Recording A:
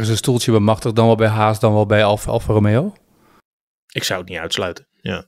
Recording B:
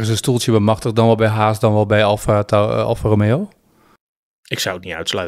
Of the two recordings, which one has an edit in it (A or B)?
A